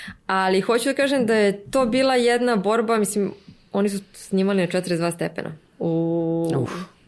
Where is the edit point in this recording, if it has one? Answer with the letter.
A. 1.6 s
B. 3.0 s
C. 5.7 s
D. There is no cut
C